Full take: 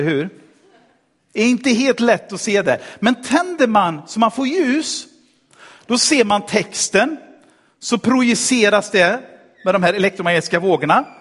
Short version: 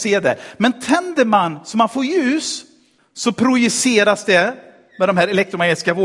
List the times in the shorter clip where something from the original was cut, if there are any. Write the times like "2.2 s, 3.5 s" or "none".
3.0 s